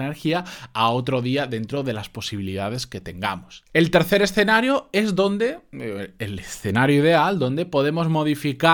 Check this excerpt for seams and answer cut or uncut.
cut